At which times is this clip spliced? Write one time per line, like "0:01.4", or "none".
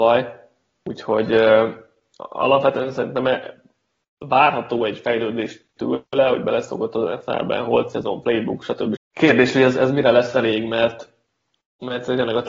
0:09.0